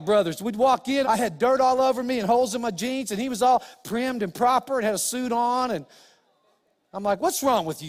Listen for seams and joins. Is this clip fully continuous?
no; 1 cut; at 1.0 s

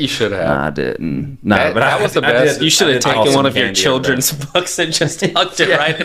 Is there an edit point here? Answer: no; 0 cuts

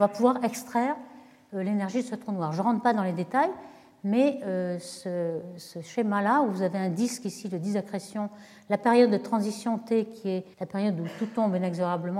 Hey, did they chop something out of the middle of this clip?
yes; 1 cut; at 10.5 s

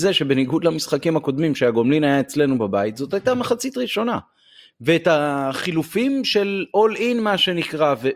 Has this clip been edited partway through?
yes; 1 cut; at 4.7 s

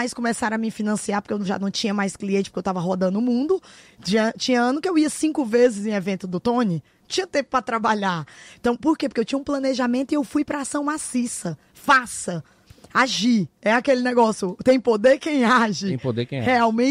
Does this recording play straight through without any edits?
yes; 0 cuts

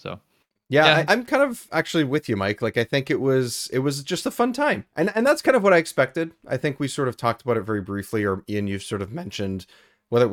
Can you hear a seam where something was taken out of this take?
yes; 1 cut; at 1.0 s

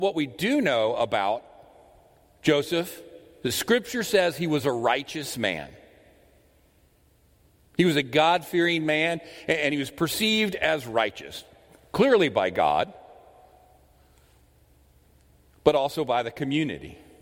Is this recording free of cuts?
yes; 0 cuts

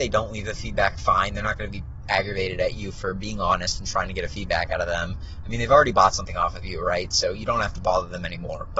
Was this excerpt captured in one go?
yes; 0 cuts

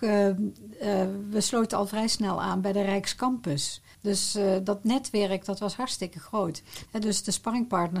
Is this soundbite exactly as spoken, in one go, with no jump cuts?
no; 2 cuts; at 3.9 s, 6.9 s

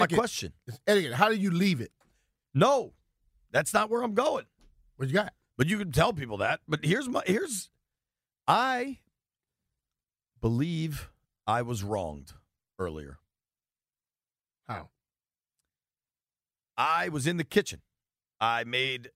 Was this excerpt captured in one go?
yes; 0 cuts

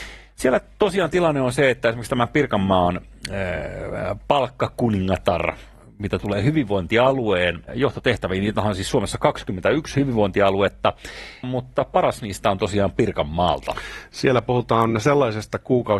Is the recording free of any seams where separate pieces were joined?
no; 2 cuts; at 7.6 s, 11.4 s

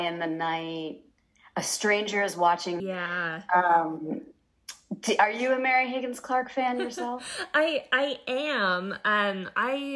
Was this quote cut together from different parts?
yes; 1 cut; at 2.8 s

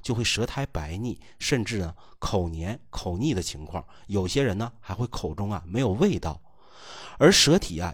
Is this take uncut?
yes; 0 cuts

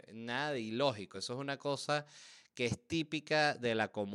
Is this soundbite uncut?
yes; 0 cuts

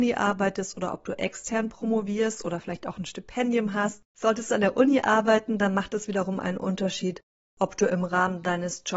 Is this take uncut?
no; 1 cut; at 4.1 s

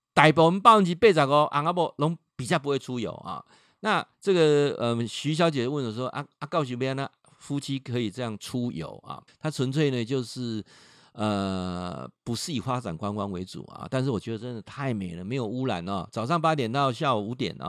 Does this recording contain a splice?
yes; 2 cuts; at 4.1 s, 9.3 s

